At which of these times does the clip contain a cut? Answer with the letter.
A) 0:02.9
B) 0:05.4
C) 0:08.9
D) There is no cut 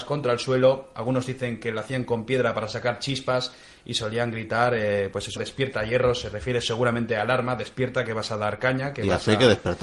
B